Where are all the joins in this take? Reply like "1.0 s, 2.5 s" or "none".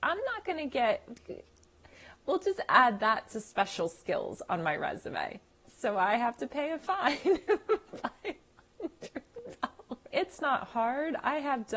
5.6 s, 10.1 s

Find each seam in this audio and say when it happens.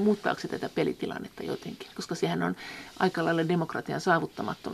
none

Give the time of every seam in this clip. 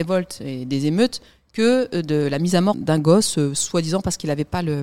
2.7 s

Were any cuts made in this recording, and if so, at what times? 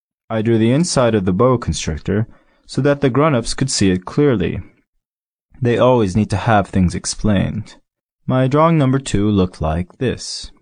none

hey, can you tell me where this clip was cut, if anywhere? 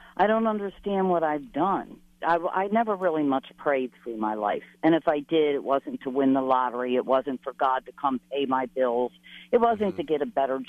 2.2 s

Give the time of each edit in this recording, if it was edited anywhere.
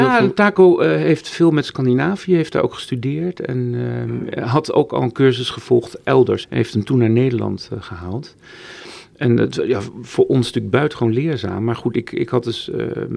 6.4 s

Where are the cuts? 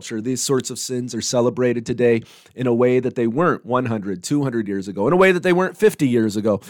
none

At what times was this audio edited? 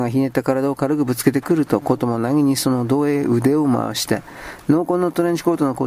none

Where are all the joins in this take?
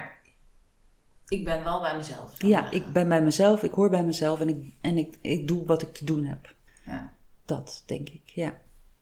6.7 s

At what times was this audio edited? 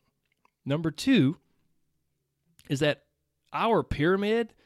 none

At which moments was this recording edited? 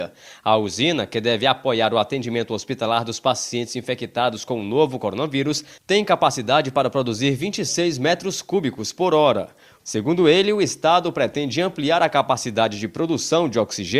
9.8 s

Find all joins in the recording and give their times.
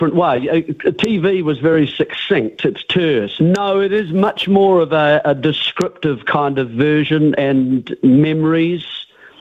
3.4 s, 7.4 s

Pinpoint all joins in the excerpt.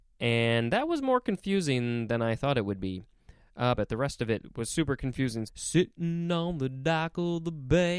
3.8 s, 5.4 s

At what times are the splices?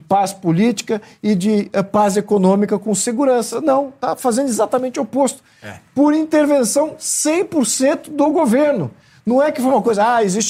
none

